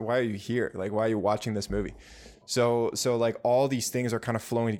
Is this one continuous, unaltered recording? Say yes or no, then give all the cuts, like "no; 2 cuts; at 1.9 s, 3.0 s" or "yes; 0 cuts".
no; 1 cut; at 2.3 s